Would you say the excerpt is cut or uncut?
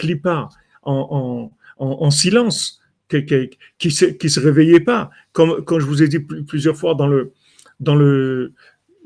uncut